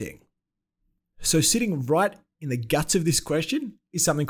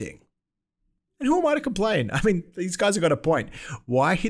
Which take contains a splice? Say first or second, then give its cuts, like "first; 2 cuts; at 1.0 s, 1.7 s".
second; 1 cut; at 1.1 s